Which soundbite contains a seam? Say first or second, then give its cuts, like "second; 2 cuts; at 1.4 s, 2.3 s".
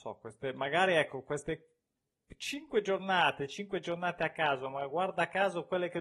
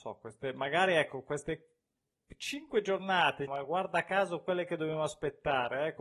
second; 1 cut; at 3.5 s